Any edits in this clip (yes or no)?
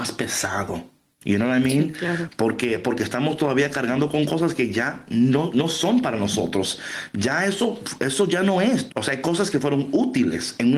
yes